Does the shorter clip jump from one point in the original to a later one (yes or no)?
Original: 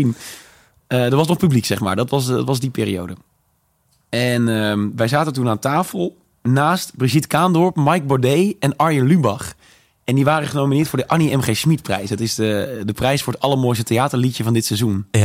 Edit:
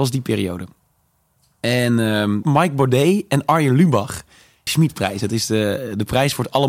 yes